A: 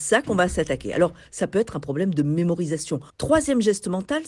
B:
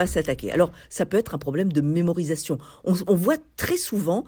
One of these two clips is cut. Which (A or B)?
A